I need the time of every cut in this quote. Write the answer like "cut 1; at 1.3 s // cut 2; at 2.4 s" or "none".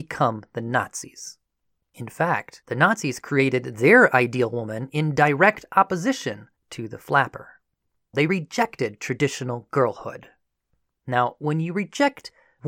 cut 1; at 8.1 s